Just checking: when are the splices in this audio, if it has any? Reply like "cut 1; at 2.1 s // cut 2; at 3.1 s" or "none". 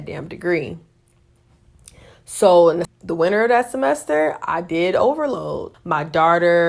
cut 1; at 2.8 s // cut 2; at 5.7 s